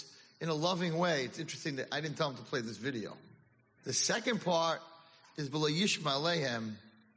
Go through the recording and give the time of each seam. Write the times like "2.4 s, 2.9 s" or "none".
3.8 s